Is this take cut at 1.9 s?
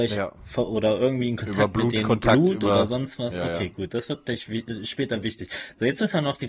no; 0 cuts

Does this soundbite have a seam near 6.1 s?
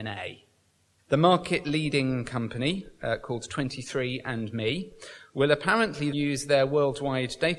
yes; 2 cuts; at 1.0 s, 6.1 s

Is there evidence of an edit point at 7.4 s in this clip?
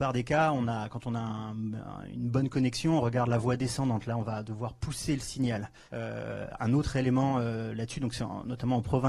no; 1 cut; at 5.9 s

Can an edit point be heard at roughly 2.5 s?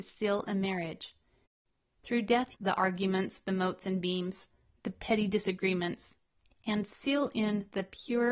yes; 1 cut; at 2.5 s

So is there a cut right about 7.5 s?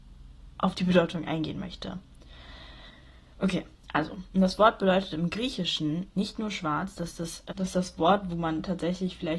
yes; 1 cut; at 7.5 s

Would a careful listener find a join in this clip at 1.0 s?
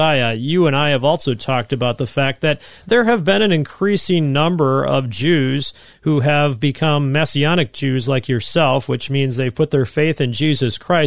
no; 0 cuts

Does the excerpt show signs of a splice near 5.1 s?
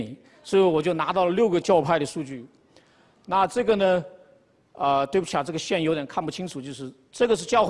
no; 1 cut; at 1.6 s

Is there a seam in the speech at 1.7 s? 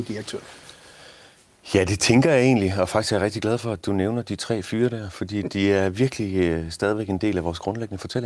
no; 0 cuts

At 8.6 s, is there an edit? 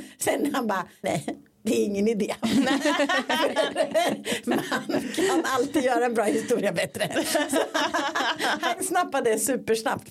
no; 1 cut; at 1.0 s

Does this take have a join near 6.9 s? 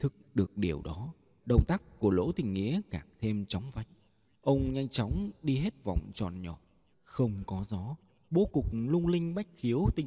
yes; 1 cut; at 6.9 s

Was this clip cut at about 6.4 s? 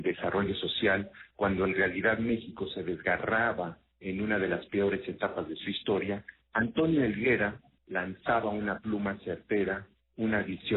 no; 0 cuts

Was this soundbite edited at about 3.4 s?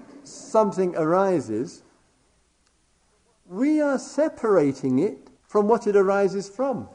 no; 1 cut; at 5.4 s

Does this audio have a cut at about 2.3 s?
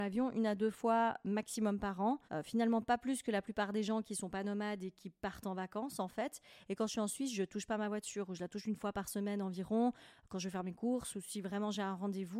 yes; 1 cut; at 2.3 s

